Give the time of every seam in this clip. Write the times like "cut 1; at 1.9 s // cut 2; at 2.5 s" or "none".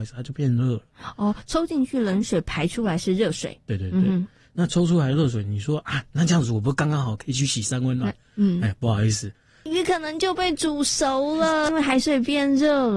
cut 1; at 9.7 s // cut 2; at 11.7 s